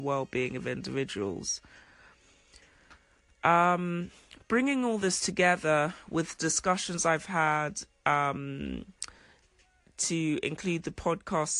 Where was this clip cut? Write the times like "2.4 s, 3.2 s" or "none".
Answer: none